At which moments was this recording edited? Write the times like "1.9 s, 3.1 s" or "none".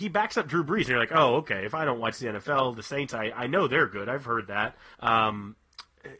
4.9 s